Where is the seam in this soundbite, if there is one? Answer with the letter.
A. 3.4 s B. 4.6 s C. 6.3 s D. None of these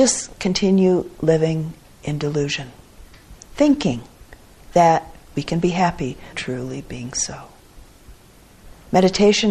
C